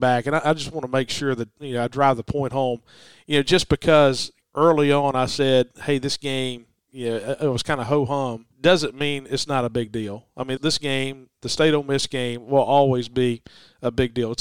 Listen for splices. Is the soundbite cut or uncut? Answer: cut